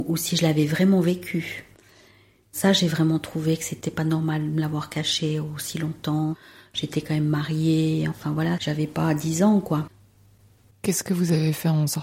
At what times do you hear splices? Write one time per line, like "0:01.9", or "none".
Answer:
none